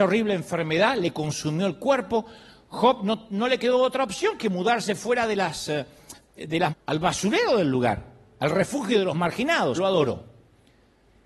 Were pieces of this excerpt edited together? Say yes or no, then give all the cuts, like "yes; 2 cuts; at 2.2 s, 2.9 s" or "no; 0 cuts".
yes; 2 cuts; at 6.7 s, 9.8 s